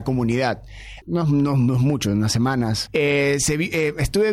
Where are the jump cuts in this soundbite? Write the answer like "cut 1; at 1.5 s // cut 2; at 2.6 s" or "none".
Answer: cut 1; at 1.0 s // cut 2; at 2.9 s